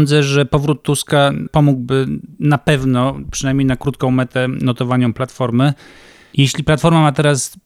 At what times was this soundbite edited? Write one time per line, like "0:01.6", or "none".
none